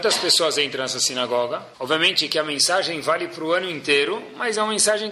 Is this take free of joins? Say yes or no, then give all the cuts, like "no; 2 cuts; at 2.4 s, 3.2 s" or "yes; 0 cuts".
no; 1 cut; at 1.7 s